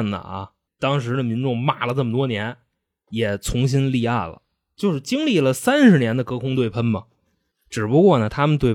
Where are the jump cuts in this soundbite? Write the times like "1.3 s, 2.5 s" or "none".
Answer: none

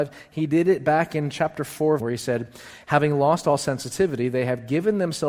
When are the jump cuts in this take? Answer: 2.0 s

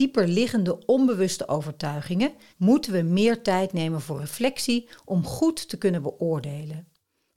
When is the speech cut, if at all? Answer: 2.5 s

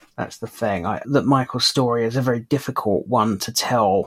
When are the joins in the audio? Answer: 1.0 s

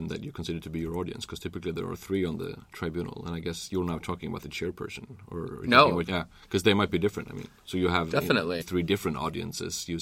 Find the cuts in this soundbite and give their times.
6.1 s, 8.6 s

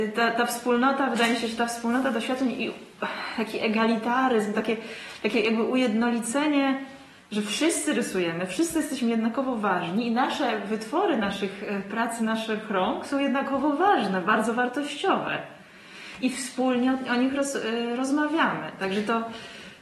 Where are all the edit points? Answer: none

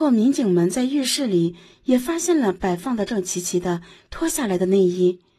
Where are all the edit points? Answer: 3.1 s

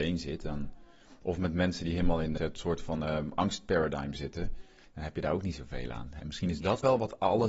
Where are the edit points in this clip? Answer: 2.4 s, 6.2 s

